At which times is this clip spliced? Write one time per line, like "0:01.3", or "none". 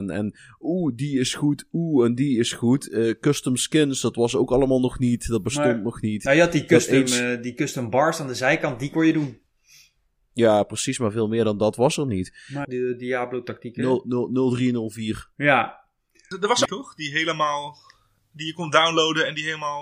0:12.6
0:16.7